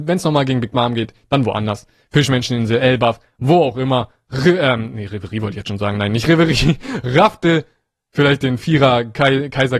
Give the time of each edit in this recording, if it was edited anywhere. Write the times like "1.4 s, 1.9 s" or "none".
none